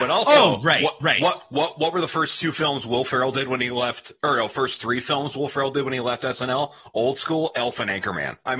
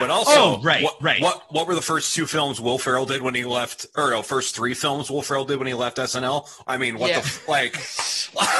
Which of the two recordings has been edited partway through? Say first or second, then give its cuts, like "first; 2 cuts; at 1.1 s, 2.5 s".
second; 2 cuts; at 1.5 s, 6.6 s